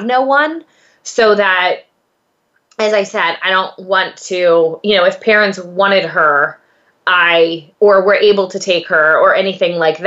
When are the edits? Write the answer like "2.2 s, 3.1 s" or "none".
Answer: 7.7 s